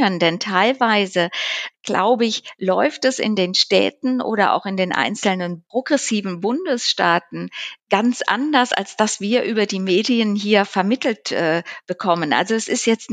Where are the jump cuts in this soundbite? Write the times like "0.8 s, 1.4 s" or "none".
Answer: 1.7 s

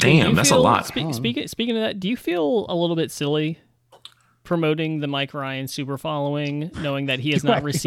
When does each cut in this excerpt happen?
none

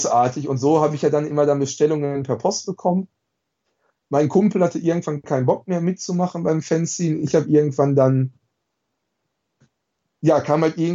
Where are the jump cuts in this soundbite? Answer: none

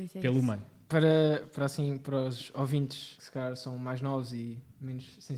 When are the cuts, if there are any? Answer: 3.2 s

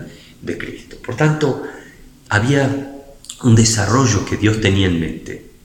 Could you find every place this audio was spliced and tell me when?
none

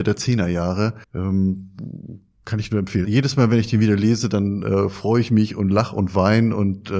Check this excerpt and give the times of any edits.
1.0 s, 3.0 s

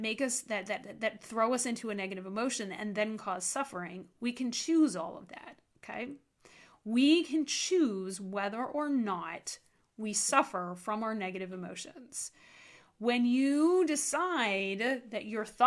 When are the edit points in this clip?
none

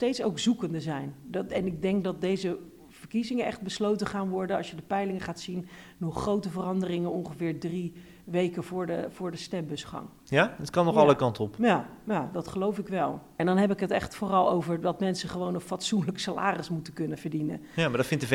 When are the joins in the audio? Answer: 13.4 s, 17.1 s

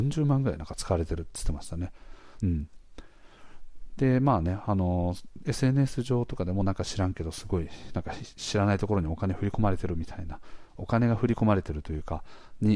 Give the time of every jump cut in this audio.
2.4 s

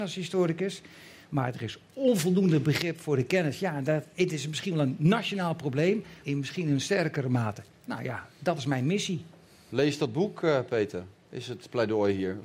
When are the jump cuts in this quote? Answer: 6.2 s

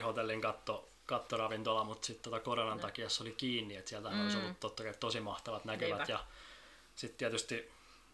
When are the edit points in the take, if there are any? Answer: none

